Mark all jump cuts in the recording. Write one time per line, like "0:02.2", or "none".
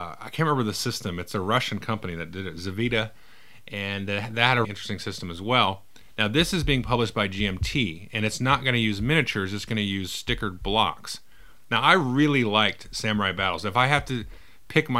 0:04.6